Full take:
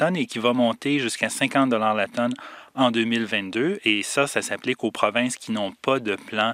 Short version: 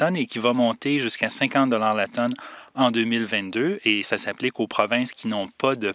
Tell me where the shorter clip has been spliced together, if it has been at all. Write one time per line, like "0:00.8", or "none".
0:04.0